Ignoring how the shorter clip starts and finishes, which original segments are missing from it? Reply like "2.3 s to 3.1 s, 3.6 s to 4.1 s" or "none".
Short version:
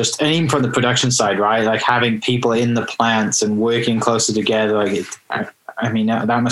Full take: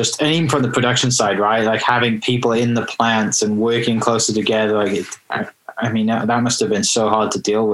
none